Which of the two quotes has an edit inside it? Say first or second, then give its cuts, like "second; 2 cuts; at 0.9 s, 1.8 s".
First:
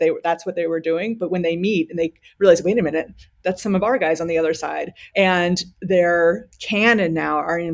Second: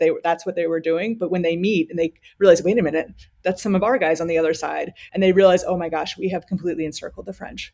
first; 1 cut; at 5.1 s